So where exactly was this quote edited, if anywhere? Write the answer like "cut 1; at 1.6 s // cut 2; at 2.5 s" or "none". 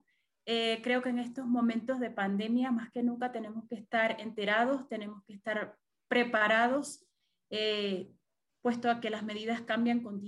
cut 1; at 8.5 s